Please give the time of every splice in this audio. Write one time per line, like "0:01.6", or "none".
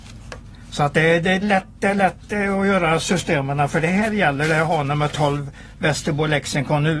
0:01.4